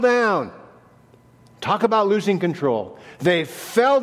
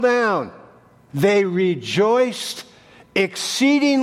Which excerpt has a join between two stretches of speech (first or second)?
second